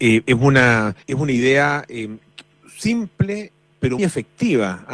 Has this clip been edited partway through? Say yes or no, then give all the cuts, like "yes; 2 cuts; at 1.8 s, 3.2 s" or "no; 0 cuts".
yes; 2 cuts; at 1.0 s, 4.0 s